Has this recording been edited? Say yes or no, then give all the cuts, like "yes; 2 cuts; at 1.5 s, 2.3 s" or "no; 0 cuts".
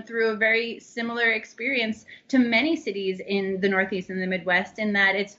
no; 0 cuts